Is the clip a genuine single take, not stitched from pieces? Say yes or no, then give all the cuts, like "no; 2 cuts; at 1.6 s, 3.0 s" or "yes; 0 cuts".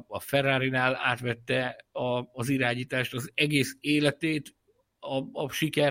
yes; 0 cuts